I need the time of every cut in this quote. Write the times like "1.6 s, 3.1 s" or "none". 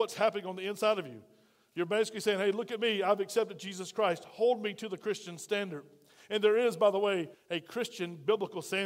7.3 s